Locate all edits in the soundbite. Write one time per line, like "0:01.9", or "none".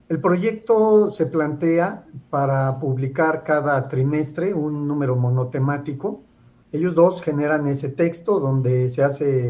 0:06.6